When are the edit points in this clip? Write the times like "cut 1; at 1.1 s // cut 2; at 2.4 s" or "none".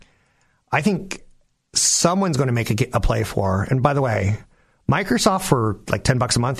none

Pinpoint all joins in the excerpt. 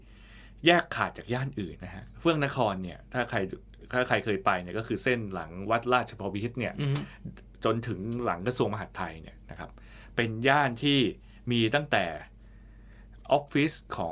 cut 1; at 1.8 s // cut 2; at 13.2 s

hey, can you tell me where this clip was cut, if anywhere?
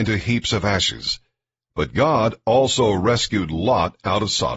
cut 1; at 1.6 s

